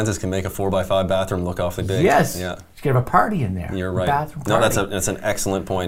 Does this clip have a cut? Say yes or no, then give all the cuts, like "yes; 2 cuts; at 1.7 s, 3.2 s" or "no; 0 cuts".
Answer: no; 0 cuts